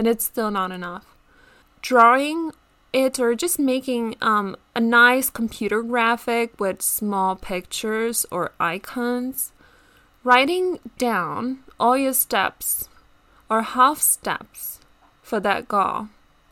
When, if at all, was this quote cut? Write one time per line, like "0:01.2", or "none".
0:01.6

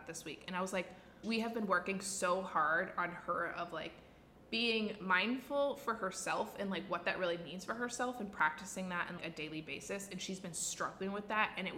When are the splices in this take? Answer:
0:01.2
0:09.2

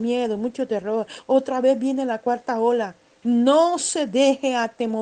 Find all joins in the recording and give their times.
0:03.2

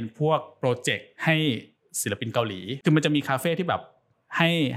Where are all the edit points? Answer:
0:01.2

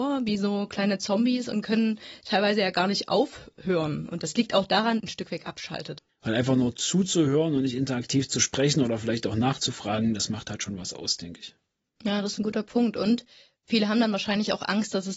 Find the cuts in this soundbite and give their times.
0:05.0
0:06.1

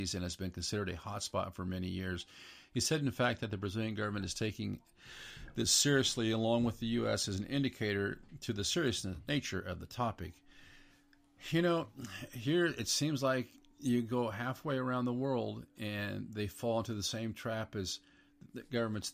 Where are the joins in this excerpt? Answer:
none

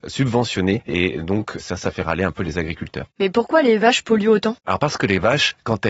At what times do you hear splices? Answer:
none

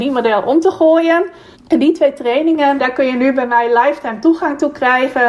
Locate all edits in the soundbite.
0:01.5
0:02.8

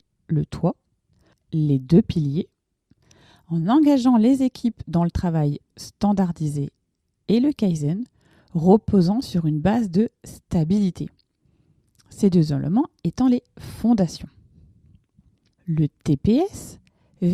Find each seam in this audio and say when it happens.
0:01.3
0:15.5

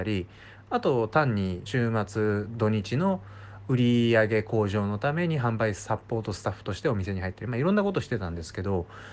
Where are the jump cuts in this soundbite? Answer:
0:01.7

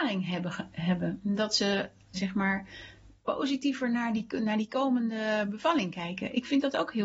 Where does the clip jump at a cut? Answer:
0:02.1

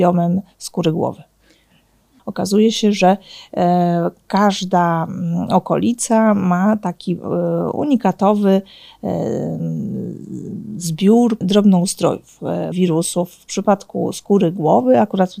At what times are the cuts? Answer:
0:02.2
0:11.4
0:12.7

